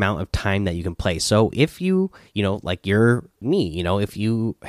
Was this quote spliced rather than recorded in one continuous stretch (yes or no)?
yes